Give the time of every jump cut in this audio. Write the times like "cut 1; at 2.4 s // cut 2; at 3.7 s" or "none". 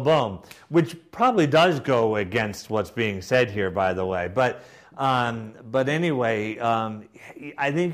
none